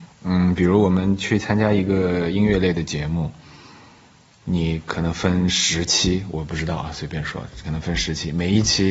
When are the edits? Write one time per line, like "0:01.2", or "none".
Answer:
none

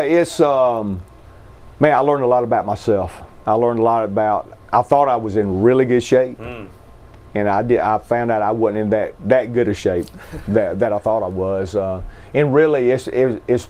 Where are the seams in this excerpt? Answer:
0:04.6

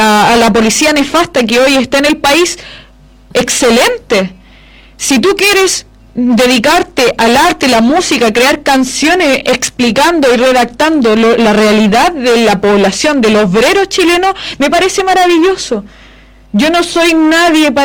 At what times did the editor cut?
none

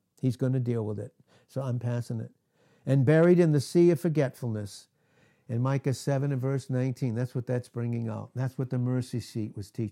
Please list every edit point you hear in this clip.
none

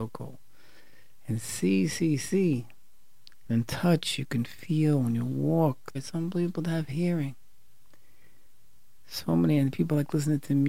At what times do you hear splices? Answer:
0:03.4
0:05.9

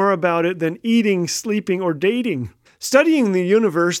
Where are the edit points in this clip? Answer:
0:02.7

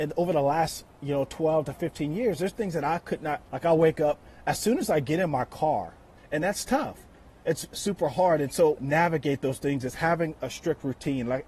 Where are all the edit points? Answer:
0:03.4
0:06.2
0:08.8

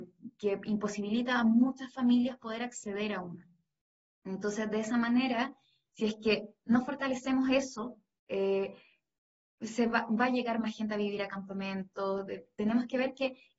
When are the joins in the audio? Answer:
none

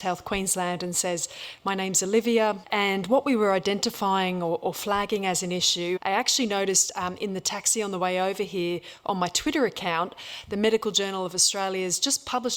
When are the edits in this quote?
0:02.6
0:06.0

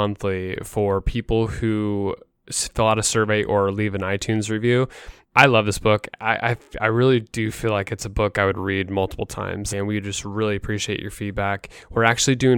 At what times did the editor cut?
0:05.2
0:09.7

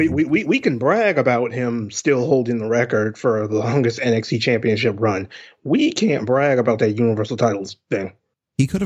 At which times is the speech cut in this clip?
none

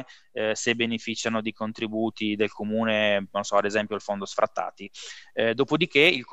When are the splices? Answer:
none

